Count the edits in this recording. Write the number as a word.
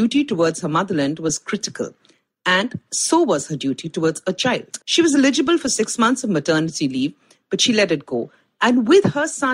one